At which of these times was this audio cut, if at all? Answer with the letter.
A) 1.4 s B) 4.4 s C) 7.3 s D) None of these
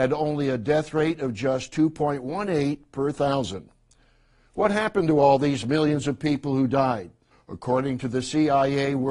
C